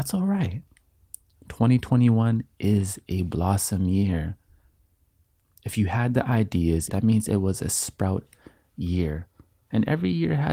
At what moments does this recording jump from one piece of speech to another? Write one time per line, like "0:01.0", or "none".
0:06.9

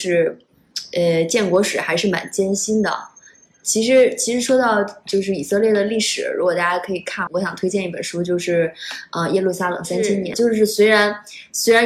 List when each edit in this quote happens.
0:07.3
0:10.3

